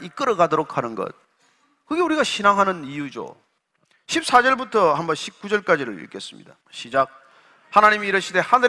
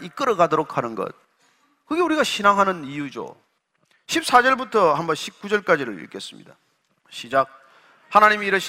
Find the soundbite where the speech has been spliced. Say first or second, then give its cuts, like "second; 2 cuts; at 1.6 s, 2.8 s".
first; 1 cut; at 6.6 s